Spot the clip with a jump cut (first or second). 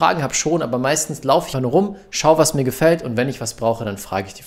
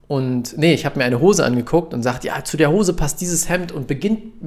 first